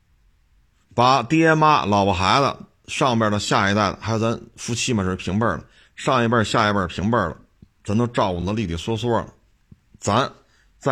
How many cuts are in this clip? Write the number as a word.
zero